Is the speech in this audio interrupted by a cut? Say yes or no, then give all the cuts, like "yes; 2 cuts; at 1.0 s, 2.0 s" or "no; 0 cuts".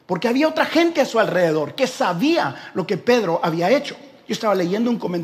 no; 0 cuts